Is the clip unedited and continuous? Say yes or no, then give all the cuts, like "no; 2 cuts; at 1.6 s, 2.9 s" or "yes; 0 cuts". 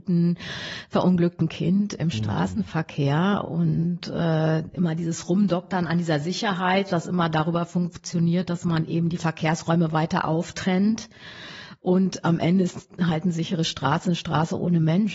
yes; 0 cuts